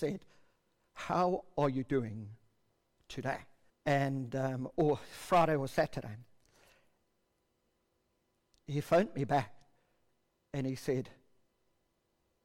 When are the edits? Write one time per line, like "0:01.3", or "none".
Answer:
0:03.7
0:08.6